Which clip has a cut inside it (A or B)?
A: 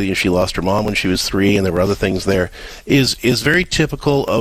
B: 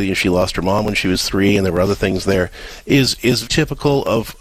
B